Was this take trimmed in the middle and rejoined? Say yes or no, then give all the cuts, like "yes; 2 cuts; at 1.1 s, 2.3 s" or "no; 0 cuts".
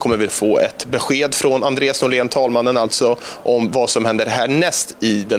no; 0 cuts